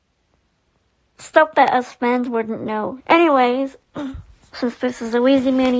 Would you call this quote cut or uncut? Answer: cut